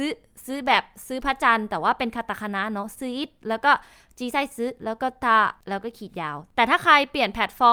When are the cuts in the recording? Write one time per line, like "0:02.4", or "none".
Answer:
none